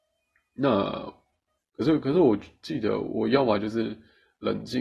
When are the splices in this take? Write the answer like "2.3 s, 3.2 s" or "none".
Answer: 1.6 s